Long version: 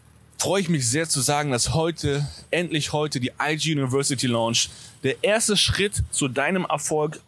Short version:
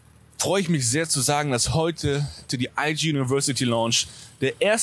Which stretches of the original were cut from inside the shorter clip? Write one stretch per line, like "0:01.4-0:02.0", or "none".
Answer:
0:02.5-0:03.1

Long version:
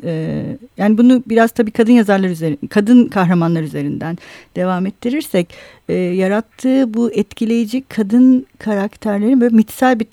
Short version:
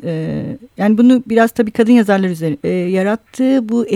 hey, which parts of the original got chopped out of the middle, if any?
0:02.6-0:05.9

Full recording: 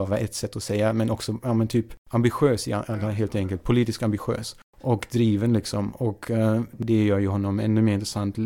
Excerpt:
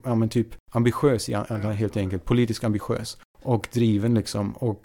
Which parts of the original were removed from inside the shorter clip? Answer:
none

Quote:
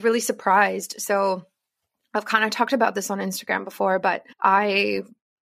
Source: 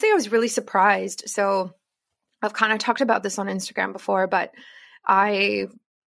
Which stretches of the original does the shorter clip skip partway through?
0:04.6-0:05.0

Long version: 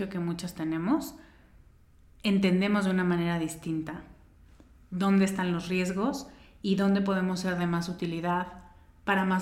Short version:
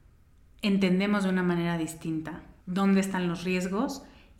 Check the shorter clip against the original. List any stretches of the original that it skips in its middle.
0:04.2-0:04.8

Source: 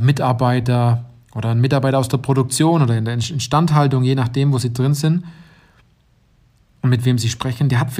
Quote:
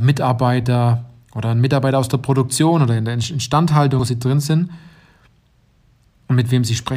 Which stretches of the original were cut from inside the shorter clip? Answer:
0:04.0-0:04.5

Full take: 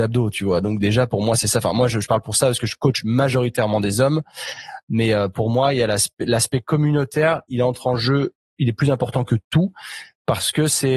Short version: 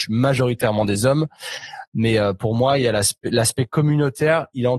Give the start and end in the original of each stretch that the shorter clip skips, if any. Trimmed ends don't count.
none

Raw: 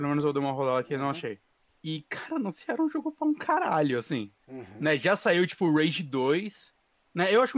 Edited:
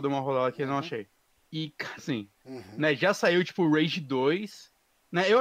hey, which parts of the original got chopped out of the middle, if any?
0:02.3-0:04.0

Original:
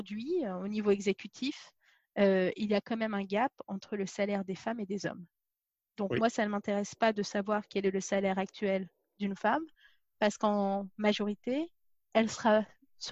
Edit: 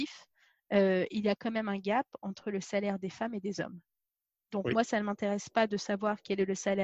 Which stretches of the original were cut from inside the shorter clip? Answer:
none

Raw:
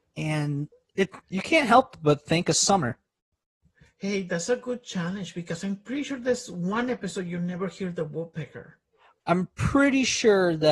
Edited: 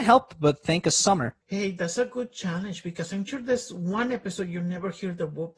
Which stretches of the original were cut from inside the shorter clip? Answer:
0:03.0-0:03.9
0:05.8-0:06.0

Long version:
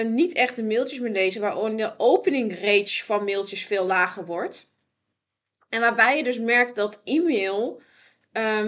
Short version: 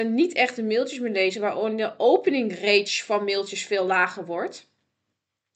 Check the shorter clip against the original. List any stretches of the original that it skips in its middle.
none

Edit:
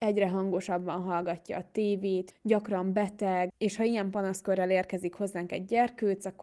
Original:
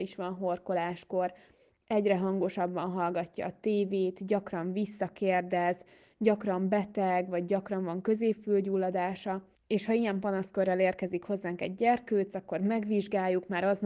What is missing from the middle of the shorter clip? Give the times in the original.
0:04.2-0:06.1
0:07.3-0:09.6

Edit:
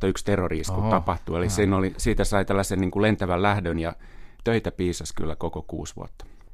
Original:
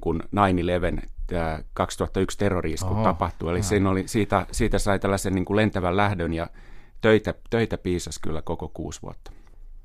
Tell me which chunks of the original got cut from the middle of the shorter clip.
0:04.1-0:04.5
0:06.9-0:07.4

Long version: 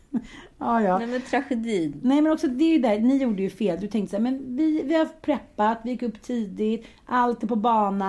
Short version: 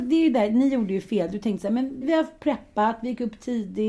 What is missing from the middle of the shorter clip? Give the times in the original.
0:04.5-0:04.8

